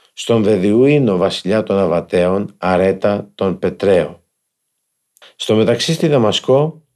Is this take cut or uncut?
cut